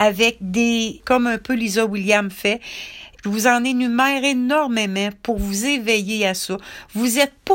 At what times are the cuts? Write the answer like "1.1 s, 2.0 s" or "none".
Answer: 1.0 s, 3.2 s